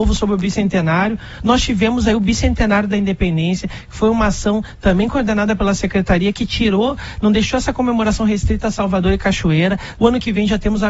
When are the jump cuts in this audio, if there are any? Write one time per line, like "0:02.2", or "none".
0:01.4
0:10.0